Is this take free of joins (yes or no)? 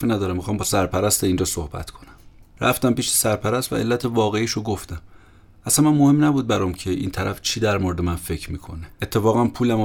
no